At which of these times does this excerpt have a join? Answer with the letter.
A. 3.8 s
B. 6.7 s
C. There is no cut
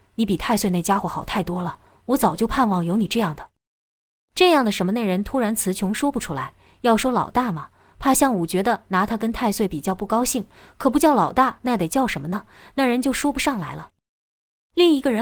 C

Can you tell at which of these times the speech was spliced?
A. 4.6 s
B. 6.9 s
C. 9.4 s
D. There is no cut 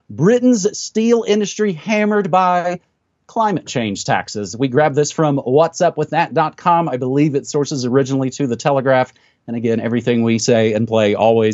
D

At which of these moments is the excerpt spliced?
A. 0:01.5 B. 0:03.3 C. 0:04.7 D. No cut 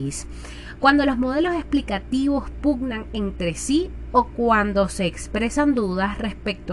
D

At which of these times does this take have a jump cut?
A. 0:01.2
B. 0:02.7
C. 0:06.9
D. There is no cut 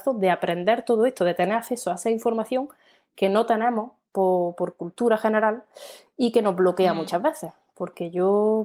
D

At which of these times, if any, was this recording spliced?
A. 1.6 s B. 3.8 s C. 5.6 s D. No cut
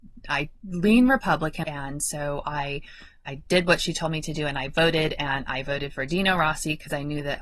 A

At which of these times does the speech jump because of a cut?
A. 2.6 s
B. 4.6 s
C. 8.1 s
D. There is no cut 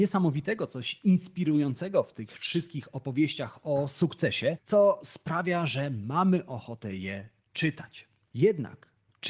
D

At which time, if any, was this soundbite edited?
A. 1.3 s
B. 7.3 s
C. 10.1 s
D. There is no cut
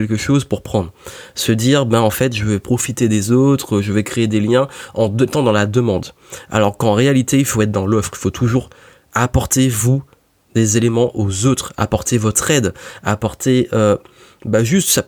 D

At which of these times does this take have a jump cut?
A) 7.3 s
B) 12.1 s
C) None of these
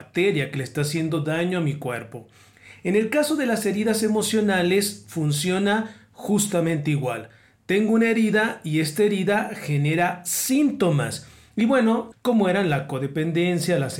B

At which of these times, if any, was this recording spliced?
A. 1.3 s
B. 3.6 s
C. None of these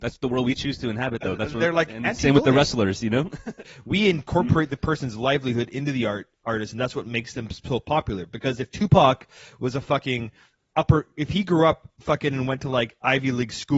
B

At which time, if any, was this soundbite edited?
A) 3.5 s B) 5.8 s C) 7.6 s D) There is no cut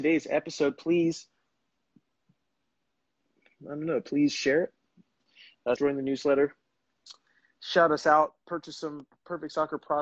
B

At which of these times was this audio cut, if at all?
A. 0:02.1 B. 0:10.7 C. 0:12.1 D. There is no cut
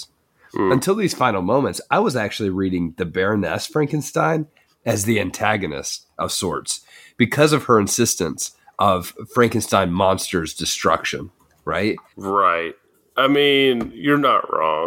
C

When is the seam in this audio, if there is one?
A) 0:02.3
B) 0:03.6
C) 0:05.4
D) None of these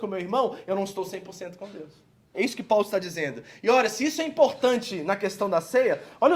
A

